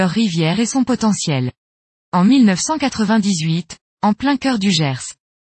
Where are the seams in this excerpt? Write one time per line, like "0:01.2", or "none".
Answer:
0:03.9

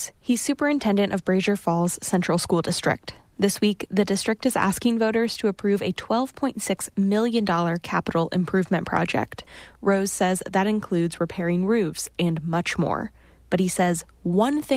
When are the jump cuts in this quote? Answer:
0:12.2

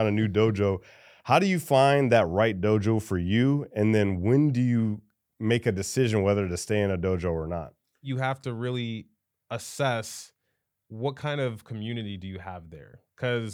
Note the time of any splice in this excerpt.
none

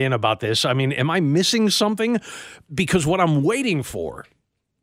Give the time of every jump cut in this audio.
none

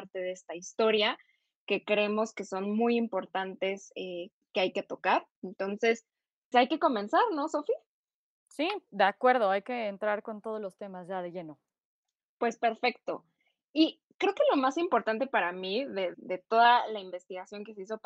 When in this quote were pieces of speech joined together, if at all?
0:06.5
0:16.1

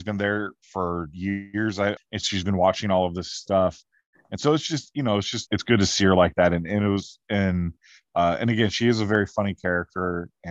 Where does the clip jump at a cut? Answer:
0:02.0
0:05.5

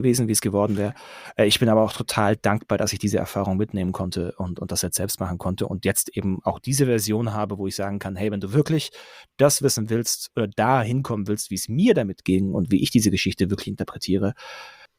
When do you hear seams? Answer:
none

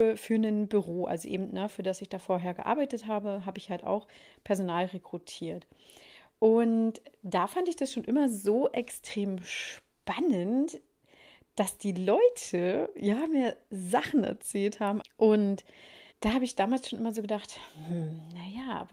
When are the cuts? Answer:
0:01.7
0:15.0
0:16.1

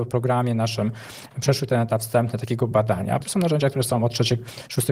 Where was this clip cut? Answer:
0:03.2

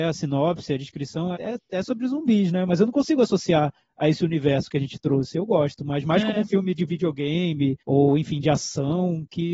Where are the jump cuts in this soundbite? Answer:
0:01.4
0:07.8

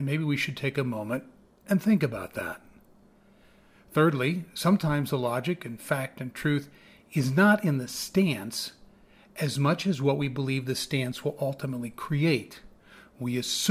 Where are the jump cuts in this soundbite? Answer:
none

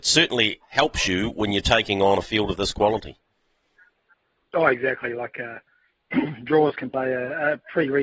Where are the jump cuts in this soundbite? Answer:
none

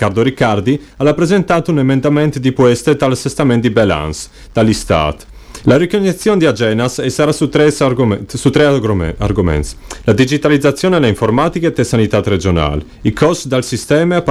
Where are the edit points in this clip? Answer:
0:05.6

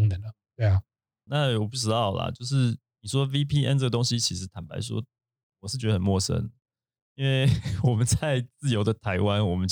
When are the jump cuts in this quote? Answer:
0:01.3

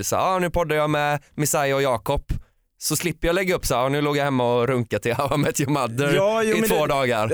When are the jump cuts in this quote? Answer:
none

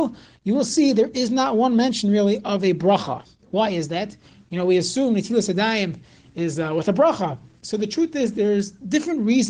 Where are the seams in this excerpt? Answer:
none

